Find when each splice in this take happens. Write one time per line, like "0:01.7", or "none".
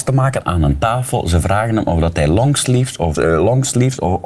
0:03.1